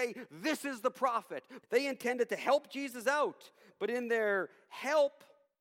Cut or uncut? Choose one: cut